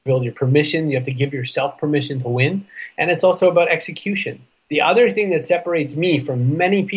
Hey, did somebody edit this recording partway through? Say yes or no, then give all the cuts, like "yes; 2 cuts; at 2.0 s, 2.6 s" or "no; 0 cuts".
no; 0 cuts